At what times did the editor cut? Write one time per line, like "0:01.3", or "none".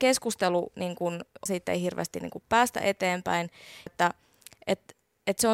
0:01.5
0:03.9